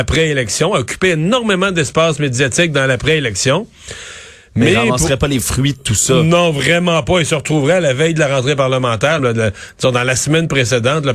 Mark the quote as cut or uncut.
cut